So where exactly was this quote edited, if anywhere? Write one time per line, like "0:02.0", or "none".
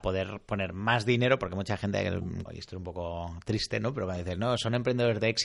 0:02.5